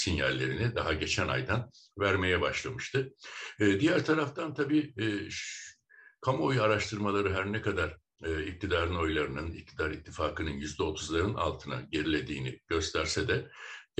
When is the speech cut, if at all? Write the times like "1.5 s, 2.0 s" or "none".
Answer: none